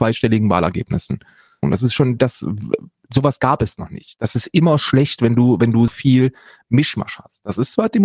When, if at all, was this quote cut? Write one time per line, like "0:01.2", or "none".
0:01.6
0:05.9

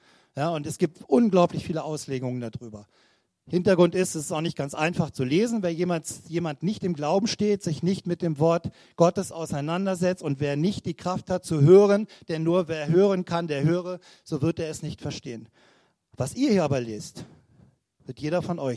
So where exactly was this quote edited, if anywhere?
none

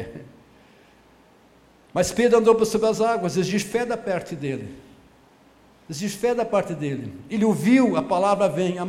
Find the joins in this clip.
none

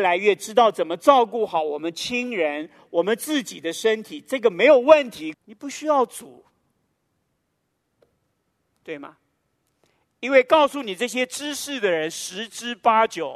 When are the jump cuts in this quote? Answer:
0:05.3

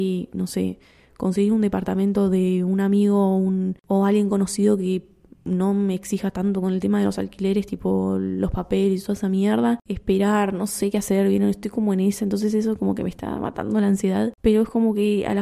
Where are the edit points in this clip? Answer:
none

